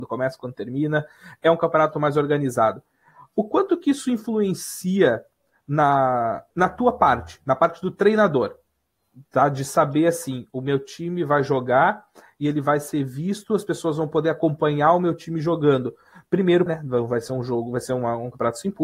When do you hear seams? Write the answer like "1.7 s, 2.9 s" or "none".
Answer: 6.5 s, 16.7 s